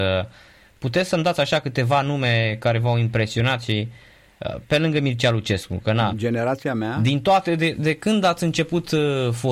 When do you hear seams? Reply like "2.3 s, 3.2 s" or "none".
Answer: 6.1 s